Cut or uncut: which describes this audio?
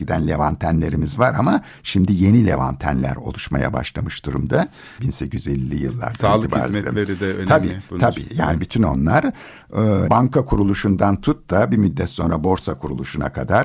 cut